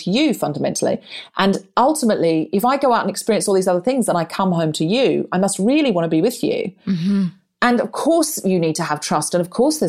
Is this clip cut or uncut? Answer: uncut